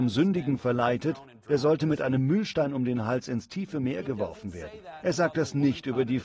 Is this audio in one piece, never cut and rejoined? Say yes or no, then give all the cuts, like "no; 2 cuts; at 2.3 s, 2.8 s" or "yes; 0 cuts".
yes; 0 cuts